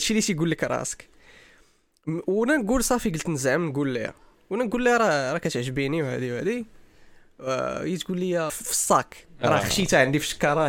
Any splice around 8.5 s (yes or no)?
yes